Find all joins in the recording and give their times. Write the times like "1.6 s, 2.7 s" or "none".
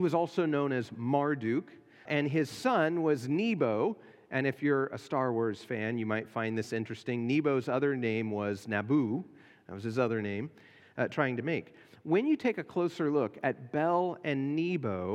2.1 s, 10.8 s